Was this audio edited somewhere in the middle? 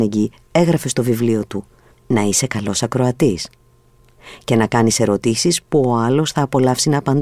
yes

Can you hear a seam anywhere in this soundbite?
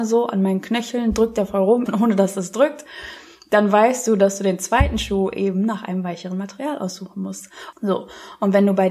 yes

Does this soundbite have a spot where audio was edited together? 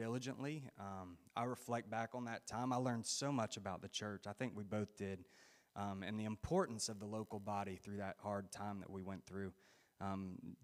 no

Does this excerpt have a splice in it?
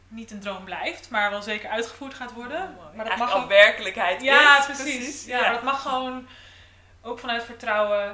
no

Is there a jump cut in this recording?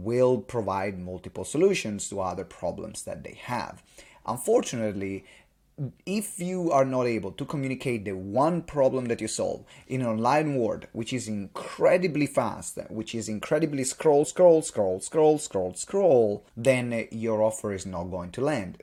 yes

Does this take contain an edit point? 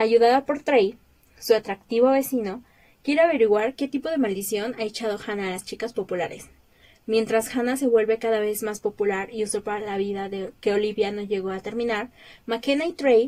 no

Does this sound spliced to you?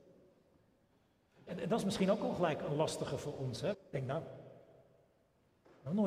yes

